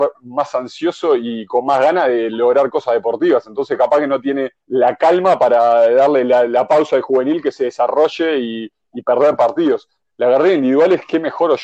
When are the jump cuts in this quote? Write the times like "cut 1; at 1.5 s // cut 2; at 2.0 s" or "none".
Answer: cut 1; at 4.6 s // cut 2; at 10.0 s